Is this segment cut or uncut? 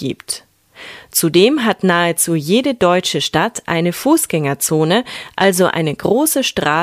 uncut